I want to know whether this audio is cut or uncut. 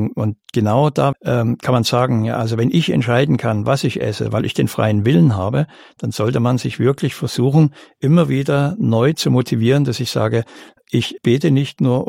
cut